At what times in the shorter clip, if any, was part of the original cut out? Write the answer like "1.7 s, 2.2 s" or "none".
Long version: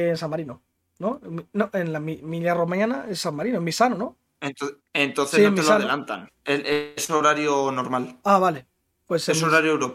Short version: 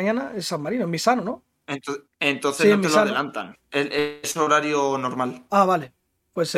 none